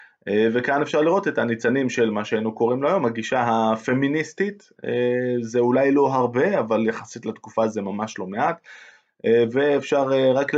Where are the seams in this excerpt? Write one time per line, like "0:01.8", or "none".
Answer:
none